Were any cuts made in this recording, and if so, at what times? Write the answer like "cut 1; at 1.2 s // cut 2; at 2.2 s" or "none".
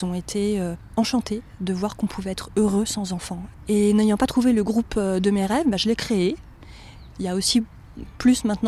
cut 1; at 7.1 s